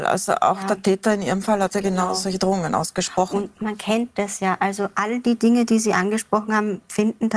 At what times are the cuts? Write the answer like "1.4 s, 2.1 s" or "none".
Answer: none